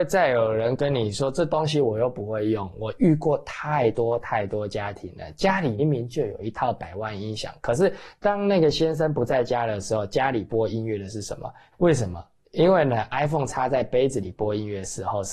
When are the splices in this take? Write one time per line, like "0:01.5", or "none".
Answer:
0:05.8
0:11.7

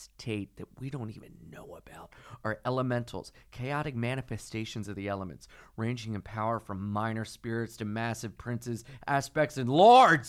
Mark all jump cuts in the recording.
none

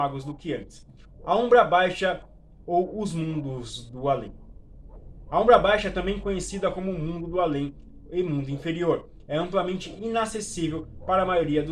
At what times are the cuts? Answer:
0:01.1

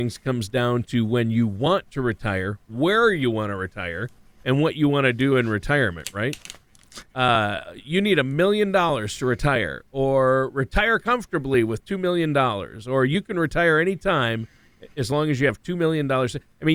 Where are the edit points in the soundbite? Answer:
0:07.1

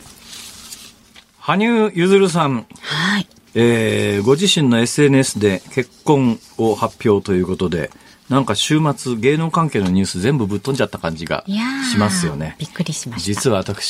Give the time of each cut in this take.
none

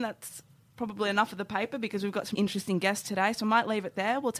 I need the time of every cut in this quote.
0:02.3

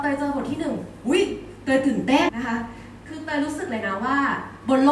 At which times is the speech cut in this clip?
0:02.3

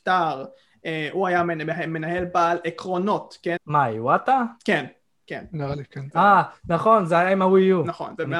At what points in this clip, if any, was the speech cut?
0:03.6
0:06.1

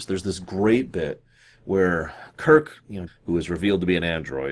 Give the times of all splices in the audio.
0:03.1

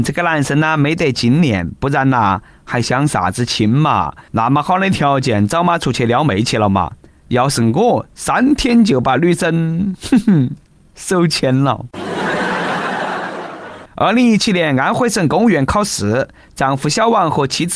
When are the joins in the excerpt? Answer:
0:13.9

